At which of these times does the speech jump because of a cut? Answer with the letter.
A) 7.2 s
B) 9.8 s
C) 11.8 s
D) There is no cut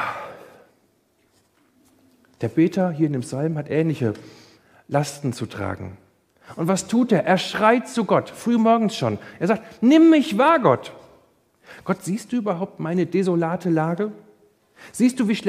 D